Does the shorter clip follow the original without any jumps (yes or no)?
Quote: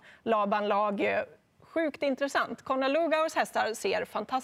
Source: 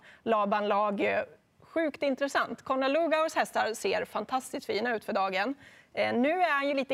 yes